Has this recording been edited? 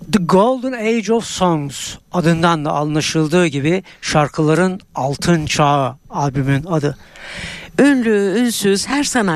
yes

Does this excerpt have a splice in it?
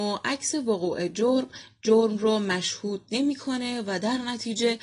no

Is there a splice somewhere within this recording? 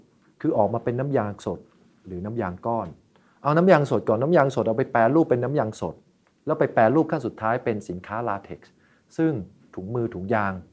no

